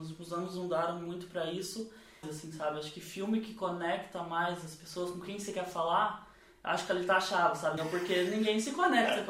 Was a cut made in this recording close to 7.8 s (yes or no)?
yes